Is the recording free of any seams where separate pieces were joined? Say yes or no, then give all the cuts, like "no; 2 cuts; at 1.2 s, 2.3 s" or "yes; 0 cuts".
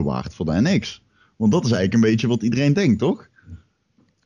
yes; 0 cuts